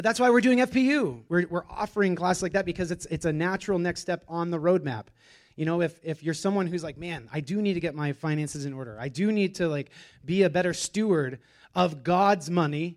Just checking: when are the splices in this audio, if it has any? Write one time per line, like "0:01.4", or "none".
0:01.3